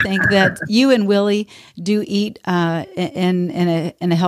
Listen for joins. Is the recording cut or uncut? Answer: uncut